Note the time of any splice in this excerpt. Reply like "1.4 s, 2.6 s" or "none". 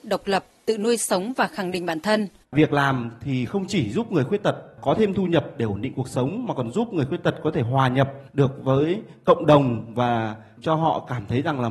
2.4 s